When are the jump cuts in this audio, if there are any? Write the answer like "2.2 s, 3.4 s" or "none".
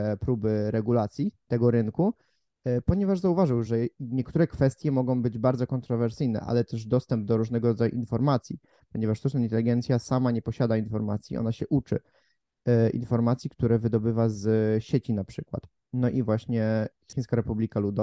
3.7 s